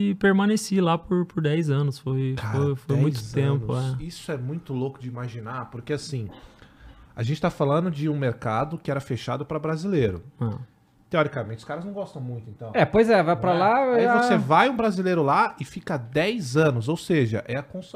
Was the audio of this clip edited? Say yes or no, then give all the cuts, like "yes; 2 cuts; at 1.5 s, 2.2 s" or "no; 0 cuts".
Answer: no; 0 cuts